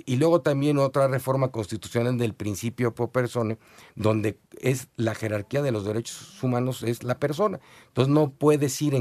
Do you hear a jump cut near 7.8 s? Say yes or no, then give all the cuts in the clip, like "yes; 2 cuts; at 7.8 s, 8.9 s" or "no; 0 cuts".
no; 0 cuts